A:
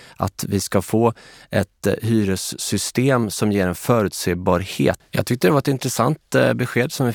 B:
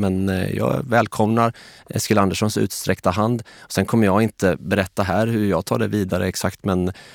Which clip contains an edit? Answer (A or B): A